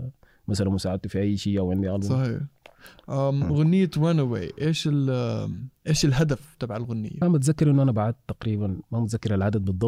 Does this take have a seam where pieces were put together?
yes; 1 cut; at 7.2 s

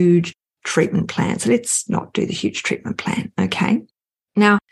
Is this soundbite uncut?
no; 1 cut; at 1.9 s

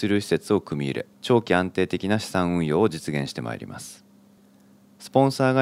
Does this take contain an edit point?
yes; 1 cut; at 1.1 s

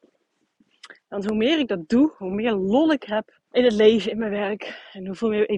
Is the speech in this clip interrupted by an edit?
yes; 2 cuts; at 1.0 s, 3.5 s

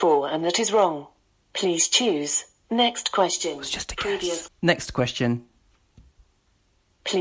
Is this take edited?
yes; 1 cut; at 4.5 s

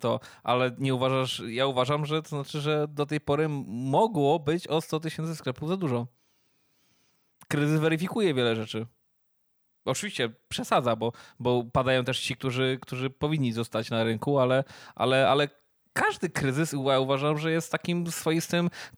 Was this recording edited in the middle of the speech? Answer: no; 0 cuts

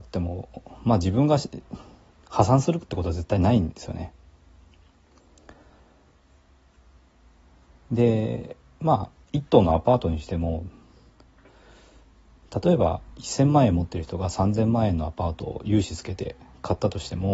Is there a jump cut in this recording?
no; 0 cuts

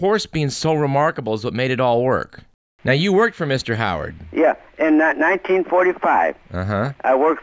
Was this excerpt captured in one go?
yes; 0 cuts

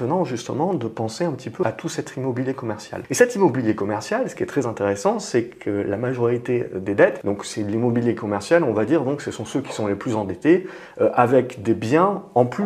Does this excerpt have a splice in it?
yes; 1 cut; at 1.6 s

